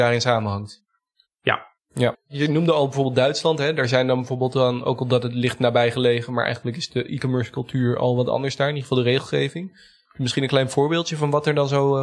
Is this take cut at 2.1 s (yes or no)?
yes